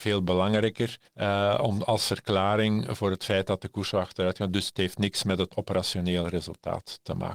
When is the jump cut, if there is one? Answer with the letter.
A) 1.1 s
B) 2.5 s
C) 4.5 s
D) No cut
A